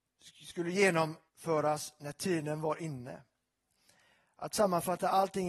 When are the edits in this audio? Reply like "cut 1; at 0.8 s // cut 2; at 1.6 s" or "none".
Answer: cut 1; at 1.3 s